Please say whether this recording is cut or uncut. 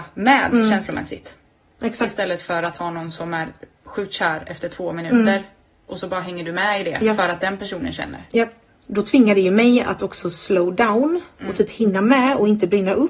cut